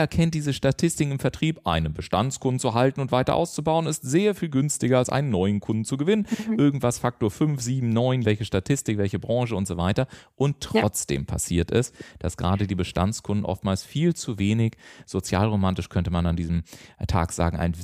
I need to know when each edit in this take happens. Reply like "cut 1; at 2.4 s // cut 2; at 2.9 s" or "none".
cut 1; at 8.2 s